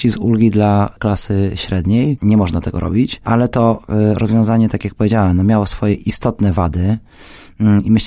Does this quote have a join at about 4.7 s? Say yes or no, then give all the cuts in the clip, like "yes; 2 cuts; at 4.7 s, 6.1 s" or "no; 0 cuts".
no; 1 cut; at 2.2 s